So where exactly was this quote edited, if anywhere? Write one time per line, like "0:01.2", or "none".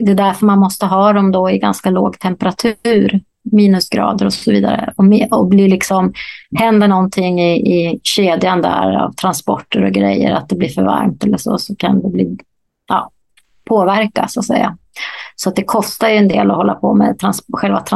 none